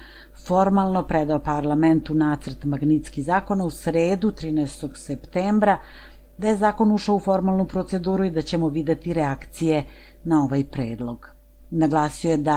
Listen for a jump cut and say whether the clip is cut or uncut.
uncut